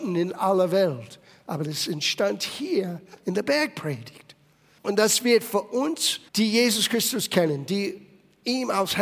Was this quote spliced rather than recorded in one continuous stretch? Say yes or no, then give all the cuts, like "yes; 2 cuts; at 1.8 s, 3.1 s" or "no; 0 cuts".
yes; 2 cuts; at 4.8 s, 6.3 s